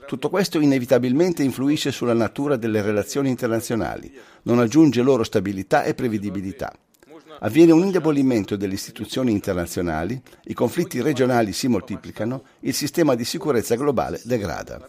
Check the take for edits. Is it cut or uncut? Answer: uncut